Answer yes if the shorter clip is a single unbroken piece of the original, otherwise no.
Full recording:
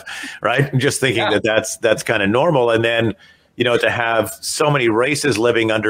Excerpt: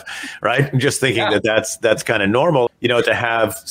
no